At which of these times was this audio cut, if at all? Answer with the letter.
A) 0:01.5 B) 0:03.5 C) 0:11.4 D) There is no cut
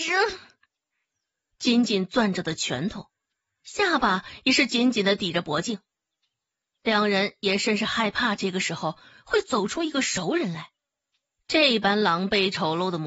A